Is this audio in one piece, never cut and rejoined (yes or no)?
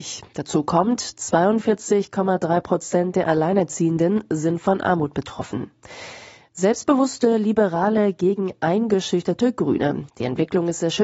no